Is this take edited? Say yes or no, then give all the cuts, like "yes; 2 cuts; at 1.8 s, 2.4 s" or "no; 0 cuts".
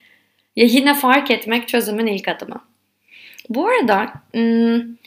no; 0 cuts